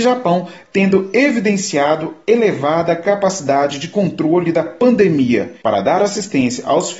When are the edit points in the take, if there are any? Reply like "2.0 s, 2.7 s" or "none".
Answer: 5.6 s